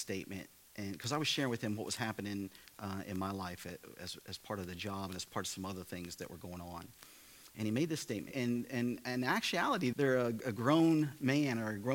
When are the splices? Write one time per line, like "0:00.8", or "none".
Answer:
0:08.3
0:09.9